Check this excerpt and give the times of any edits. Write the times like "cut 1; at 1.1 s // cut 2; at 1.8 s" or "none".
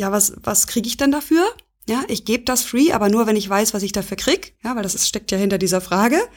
none

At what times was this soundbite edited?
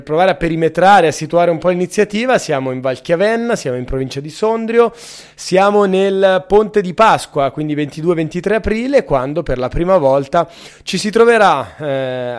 none

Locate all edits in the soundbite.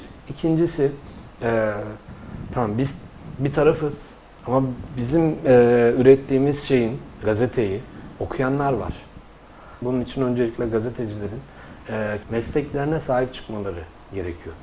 cut 1; at 7.2 s // cut 2; at 9.8 s // cut 3; at 12.2 s

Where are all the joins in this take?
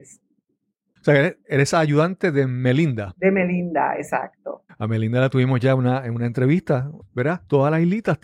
cut 1; at 1.0 s // cut 2; at 4.7 s // cut 3; at 7.0 s

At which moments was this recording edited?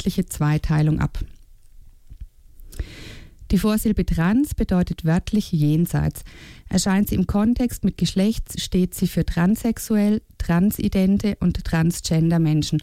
none

